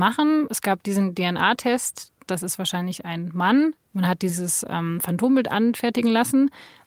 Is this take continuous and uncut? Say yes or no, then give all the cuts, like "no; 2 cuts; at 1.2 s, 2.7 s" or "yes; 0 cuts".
no; 1 cut; at 2.3 s